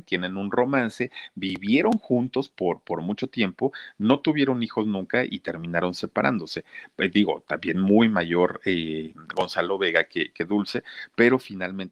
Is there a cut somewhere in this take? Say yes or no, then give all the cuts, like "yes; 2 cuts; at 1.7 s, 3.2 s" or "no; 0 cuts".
no; 0 cuts